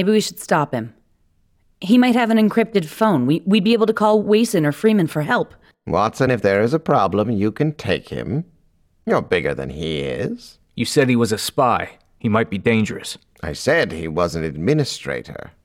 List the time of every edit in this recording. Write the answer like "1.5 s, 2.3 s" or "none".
none